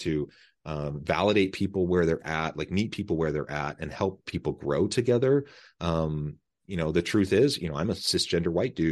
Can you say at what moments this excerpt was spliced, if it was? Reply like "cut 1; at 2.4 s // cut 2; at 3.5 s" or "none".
none